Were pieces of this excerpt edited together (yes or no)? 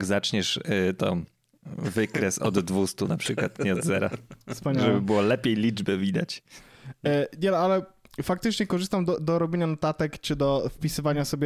no